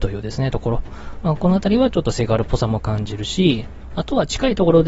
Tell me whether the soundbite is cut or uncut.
uncut